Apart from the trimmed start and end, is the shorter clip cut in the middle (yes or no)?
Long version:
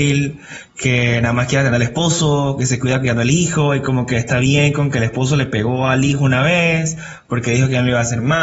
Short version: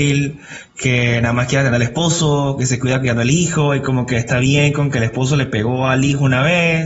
no